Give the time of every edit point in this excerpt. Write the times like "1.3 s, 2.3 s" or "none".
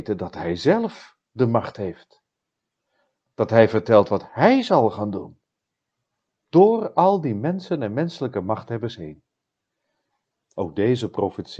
10.3 s